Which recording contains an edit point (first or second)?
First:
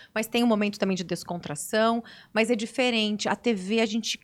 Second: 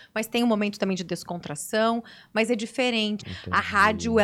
second